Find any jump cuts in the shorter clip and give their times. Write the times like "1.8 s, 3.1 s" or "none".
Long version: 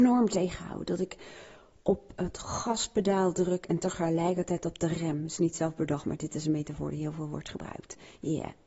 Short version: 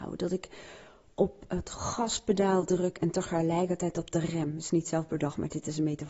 none